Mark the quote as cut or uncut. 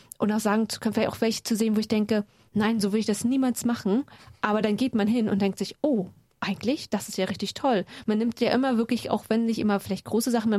uncut